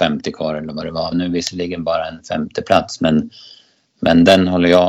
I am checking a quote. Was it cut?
yes; 1 cut; at 1.1 s

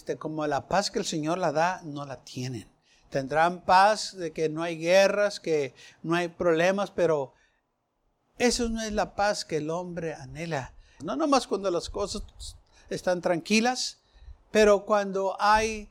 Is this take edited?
yes; 1 cut; at 11.0 s

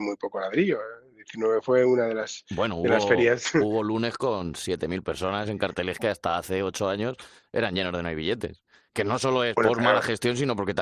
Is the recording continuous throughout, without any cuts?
yes; 0 cuts

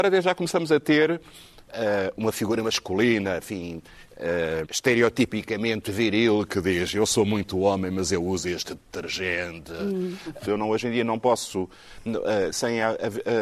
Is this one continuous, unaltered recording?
no; 3 cuts; at 4.6 s, 10.5 s, 12.5 s

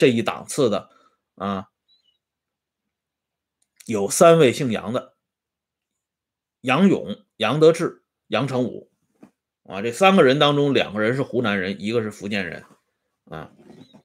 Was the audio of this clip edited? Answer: no; 0 cuts

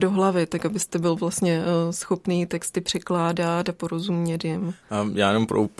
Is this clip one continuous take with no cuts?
yes; 0 cuts

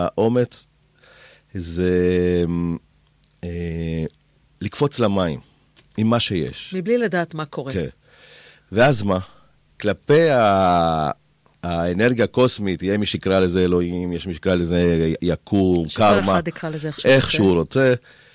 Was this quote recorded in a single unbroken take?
yes; 0 cuts

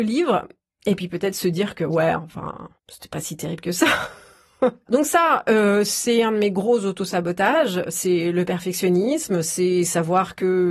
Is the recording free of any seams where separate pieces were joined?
no; 2 cuts; at 2.8 s, 4.9 s

